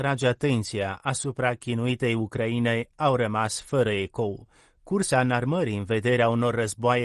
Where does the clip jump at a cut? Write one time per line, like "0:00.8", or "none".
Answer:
0:04.8